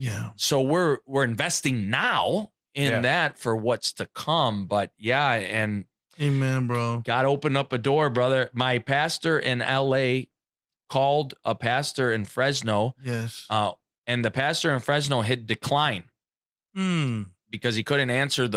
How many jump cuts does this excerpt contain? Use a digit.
1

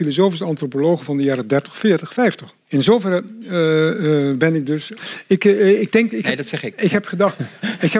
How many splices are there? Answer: 2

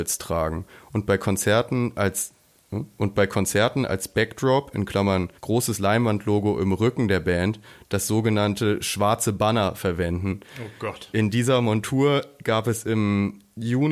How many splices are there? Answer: 1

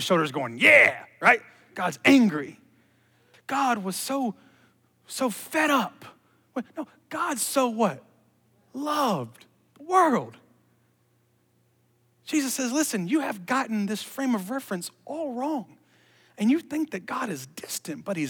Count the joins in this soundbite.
1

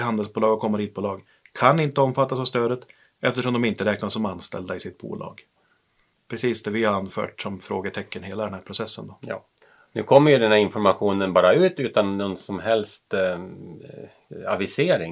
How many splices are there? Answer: 0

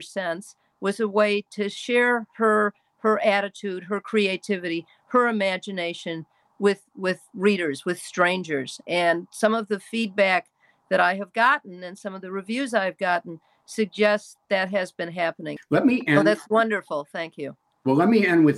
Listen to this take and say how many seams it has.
2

